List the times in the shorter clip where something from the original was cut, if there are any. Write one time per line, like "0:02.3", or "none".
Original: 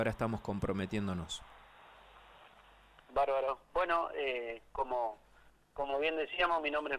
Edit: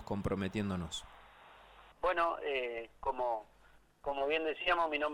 0:01.9